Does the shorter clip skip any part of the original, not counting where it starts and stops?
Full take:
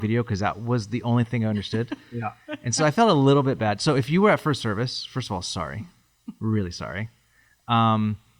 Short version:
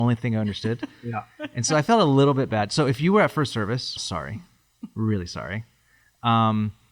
yes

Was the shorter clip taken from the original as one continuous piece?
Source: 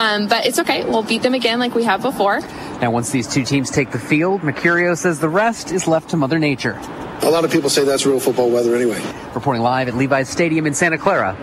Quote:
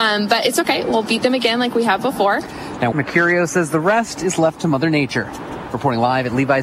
no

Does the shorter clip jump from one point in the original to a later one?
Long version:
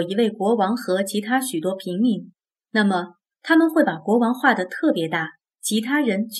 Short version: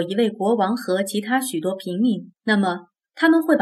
yes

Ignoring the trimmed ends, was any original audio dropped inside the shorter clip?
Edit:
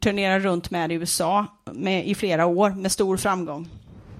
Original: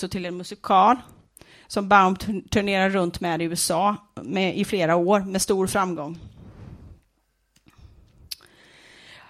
no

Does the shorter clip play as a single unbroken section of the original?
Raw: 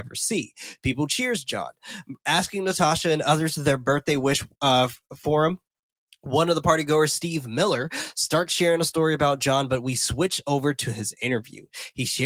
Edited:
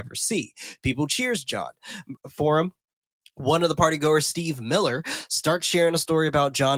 no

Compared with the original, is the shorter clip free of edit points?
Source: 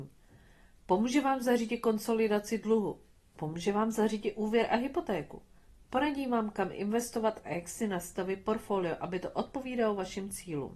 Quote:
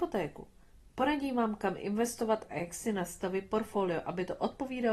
yes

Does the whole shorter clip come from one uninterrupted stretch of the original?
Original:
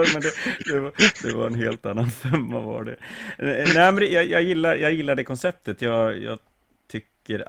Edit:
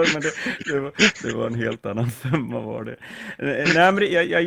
yes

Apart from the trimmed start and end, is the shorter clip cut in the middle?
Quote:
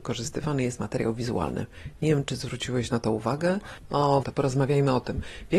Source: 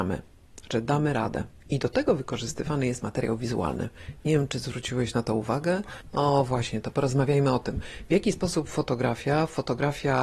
yes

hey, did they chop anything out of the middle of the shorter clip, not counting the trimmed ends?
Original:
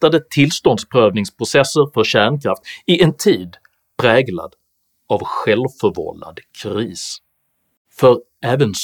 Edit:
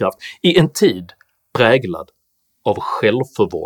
no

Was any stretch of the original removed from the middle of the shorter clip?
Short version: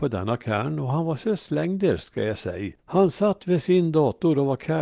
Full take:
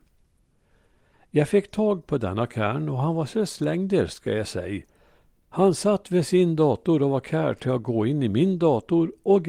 yes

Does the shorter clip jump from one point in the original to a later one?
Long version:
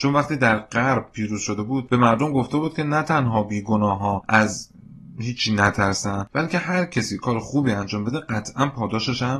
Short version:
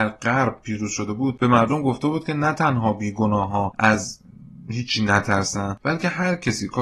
no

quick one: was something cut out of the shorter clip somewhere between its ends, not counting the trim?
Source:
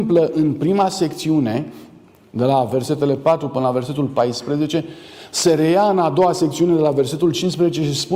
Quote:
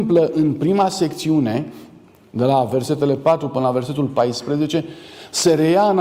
no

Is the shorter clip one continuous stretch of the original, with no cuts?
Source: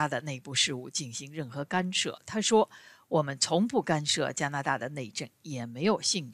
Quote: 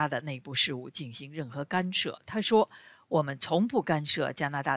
yes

